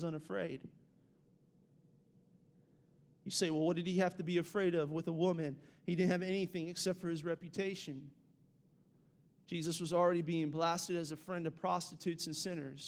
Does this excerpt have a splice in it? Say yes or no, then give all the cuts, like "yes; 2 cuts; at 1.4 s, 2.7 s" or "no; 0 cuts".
no; 0 cuts